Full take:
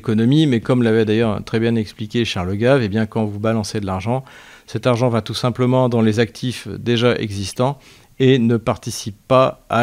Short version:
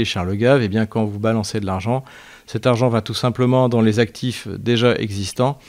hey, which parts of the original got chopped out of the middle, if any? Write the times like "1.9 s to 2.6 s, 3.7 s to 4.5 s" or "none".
none

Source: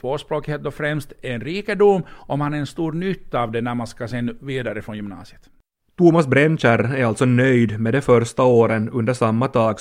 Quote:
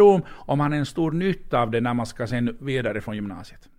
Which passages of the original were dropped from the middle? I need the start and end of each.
none

